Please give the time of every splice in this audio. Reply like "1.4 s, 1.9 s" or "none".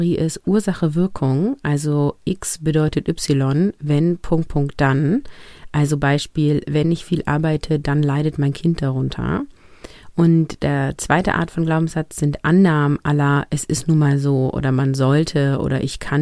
4.5 s